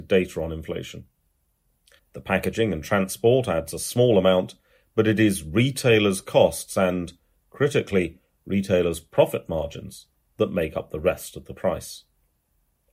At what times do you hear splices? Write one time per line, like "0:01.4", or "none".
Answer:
0:02.0